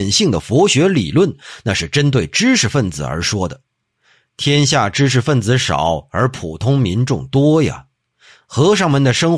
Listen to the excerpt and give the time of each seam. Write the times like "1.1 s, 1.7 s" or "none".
none